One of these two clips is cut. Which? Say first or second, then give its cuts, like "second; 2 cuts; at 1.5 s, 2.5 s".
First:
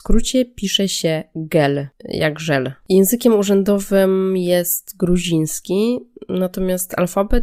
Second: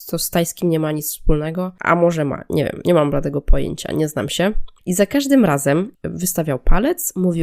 second; 2 cuts; at 4.8 s, 5.9 s